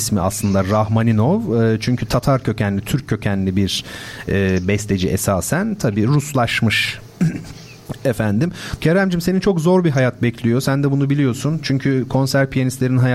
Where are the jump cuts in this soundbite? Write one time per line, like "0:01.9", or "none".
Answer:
0:08.8